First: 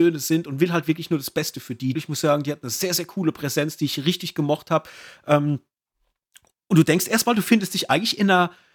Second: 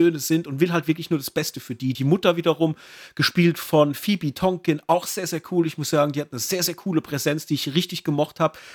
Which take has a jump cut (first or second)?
first